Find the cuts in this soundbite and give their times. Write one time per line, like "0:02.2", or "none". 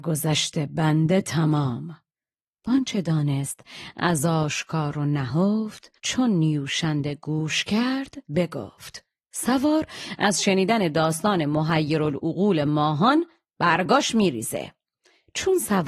0:06.0
0:08.3